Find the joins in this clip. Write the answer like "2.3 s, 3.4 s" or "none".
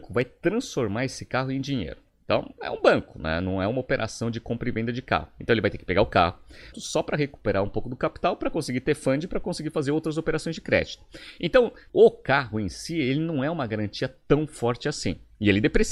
6.7 s, 11.9 s